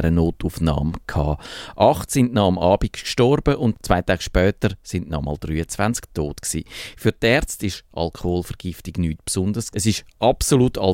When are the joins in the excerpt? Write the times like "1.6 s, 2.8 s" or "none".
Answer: 9.7 s